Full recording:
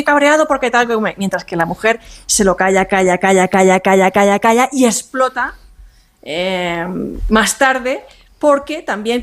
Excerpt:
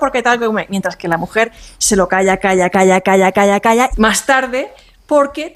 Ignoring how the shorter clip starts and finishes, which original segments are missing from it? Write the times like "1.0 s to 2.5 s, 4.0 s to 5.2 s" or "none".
3.2 s to 3.5 s, 4.7 s to 7.2 s